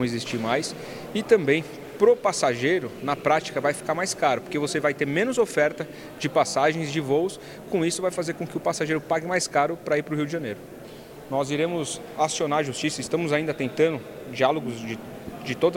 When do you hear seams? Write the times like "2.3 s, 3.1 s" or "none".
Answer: none